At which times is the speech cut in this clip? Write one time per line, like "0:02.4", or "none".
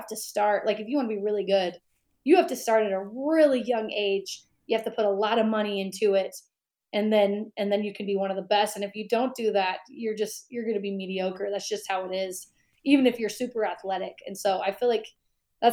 none